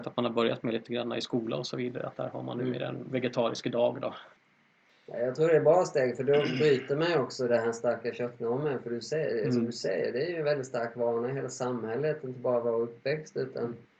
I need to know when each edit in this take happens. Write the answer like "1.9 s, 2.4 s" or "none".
none